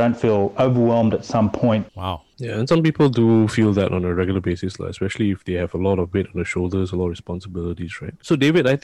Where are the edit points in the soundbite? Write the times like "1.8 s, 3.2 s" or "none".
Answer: 1.9 s